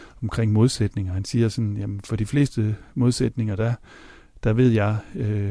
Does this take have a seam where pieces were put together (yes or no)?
no